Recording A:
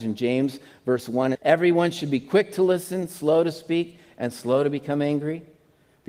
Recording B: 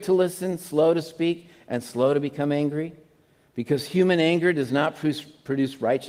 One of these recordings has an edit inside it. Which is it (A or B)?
A